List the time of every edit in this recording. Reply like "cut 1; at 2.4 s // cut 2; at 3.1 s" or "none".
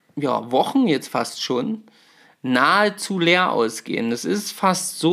none